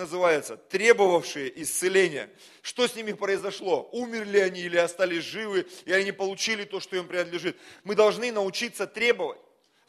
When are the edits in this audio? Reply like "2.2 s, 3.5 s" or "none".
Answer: none